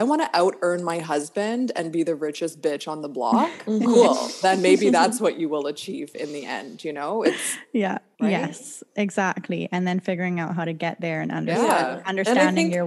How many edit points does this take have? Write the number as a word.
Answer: one